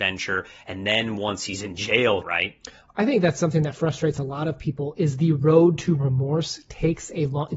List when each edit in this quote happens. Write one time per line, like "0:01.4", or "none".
0:02.2